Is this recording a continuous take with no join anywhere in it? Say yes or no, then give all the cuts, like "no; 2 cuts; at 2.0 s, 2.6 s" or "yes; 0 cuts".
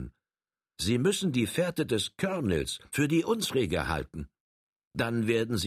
no; 1 cut; at 2.9 s